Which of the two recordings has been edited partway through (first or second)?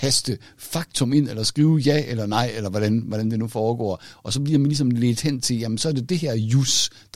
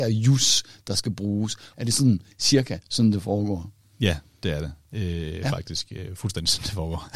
second